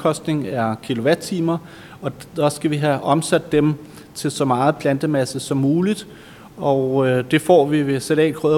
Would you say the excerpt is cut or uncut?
uncut